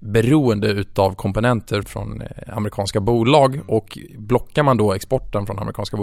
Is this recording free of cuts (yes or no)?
no